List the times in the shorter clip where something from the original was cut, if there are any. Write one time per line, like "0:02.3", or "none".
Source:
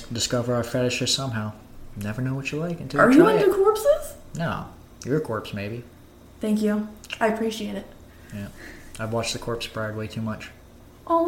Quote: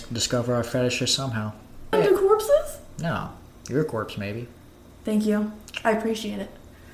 0:01.9